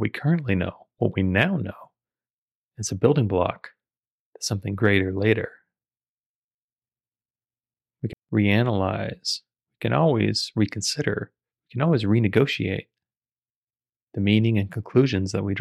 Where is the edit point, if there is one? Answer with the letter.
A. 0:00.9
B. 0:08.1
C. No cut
B